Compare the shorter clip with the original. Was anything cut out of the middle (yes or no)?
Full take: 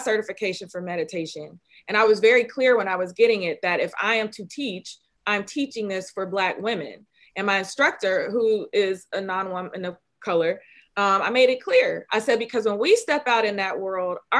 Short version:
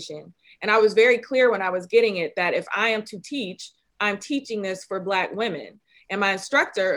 no